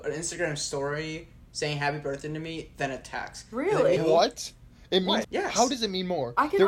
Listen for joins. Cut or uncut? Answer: cut